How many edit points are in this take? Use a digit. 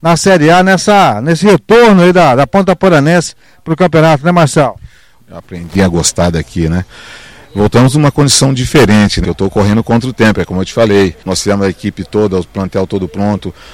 3